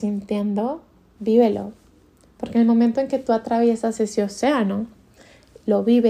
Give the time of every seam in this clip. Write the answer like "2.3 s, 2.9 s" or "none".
none

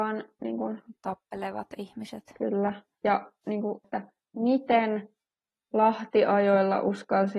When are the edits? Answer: 3.8 s

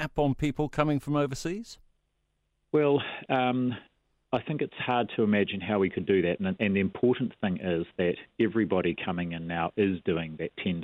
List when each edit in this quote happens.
none

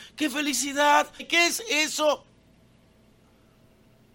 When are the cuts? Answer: 1.2 s

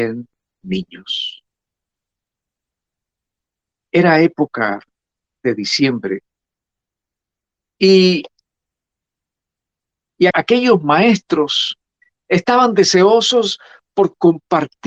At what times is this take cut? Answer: 10.3 s

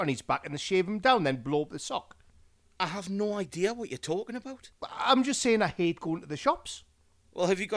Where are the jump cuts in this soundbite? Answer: none

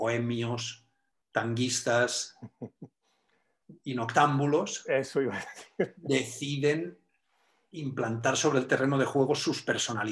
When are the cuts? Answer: none

